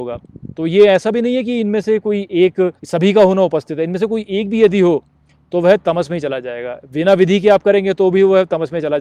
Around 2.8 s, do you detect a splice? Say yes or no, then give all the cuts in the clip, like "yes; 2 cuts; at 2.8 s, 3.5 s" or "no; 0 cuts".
yes; 1 cut; at 2.8 s